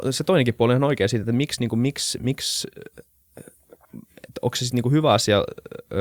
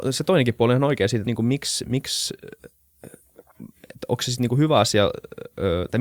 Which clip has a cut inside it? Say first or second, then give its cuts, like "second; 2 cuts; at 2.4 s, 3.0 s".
second; 1 cut; at 1.2 s